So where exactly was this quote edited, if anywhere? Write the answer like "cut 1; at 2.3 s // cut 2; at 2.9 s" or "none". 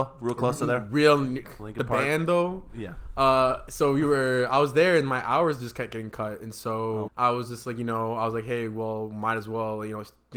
cut 1; at 1.4 s // cut 2; at 7.1 s